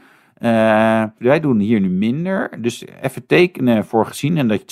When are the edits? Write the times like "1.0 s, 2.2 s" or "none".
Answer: 1.2 s